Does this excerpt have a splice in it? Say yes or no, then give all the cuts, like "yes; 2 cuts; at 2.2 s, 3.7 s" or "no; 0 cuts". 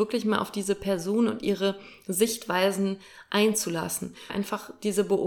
yes; 1 cut; at 4.3 s